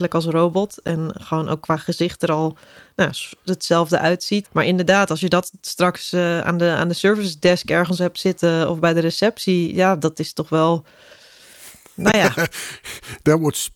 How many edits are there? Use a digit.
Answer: 1